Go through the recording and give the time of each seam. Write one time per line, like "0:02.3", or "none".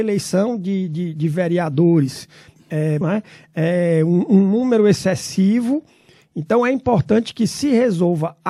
0:03.0